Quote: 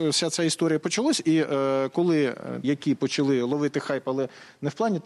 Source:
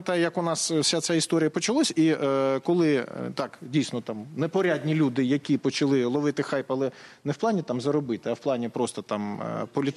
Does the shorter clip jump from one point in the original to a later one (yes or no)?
yes